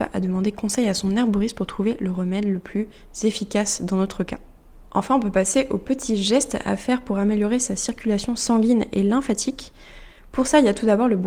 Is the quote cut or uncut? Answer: uncut